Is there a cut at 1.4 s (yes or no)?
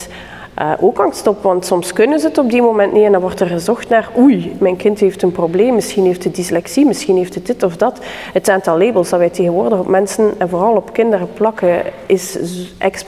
no